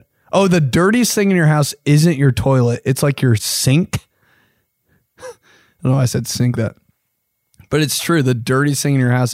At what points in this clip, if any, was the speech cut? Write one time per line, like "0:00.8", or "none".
0:06.5